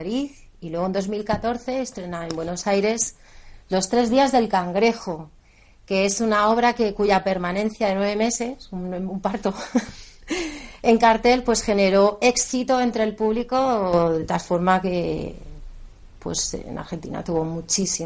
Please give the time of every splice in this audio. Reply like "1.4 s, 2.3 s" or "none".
none